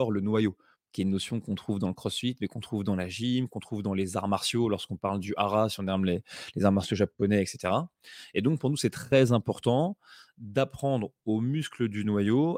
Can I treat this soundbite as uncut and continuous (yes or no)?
yes